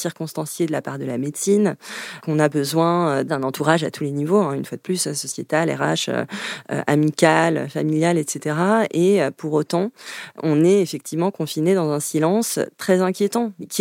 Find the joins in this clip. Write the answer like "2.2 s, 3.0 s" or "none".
none